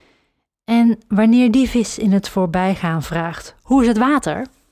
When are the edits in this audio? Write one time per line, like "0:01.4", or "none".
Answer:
0:03.6